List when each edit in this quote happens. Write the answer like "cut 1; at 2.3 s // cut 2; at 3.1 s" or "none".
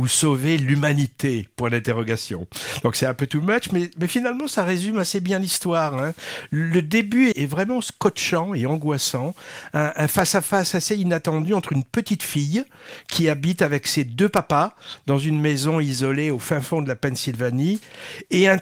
cut 1; at 7.3 s